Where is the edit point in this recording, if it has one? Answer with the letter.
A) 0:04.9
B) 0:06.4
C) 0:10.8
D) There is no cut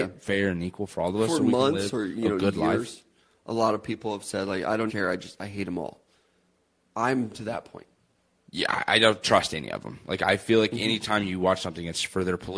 A